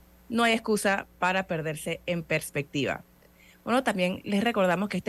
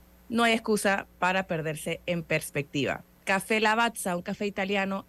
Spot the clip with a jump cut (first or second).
second